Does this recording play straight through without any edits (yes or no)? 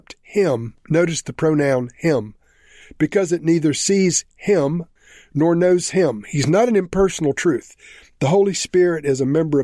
yes